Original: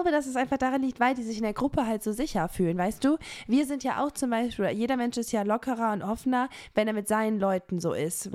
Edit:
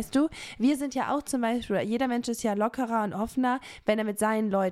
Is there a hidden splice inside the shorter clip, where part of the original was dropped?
no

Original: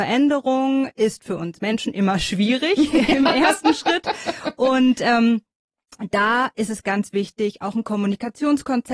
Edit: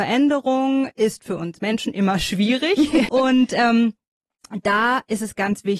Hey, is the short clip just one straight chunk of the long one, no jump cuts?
no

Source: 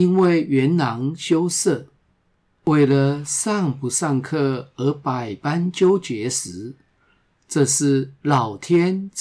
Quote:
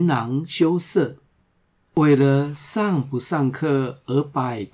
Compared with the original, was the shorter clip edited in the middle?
no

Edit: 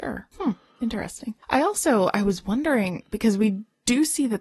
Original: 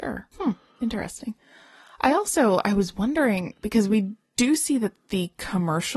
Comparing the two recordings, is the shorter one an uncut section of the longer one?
no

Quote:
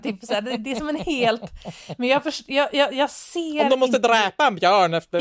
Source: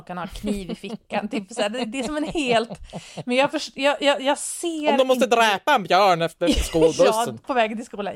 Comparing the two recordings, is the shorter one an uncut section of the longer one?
yes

